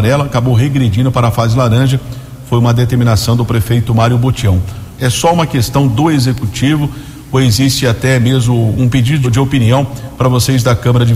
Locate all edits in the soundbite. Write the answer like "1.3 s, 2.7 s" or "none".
5.0 s, 9.2 s

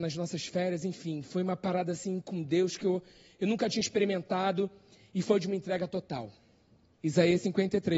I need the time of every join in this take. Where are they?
6.9 s

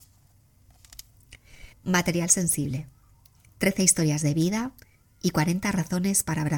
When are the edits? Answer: 1.7 s

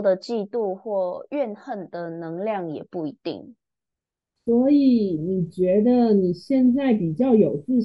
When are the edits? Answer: 4.4 s

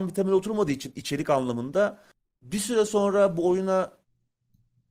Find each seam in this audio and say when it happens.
none

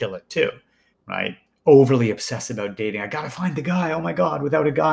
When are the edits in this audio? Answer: 0.9 s

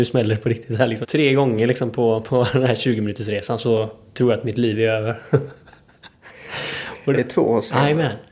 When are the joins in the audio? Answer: 1.0 s, 7.1 s

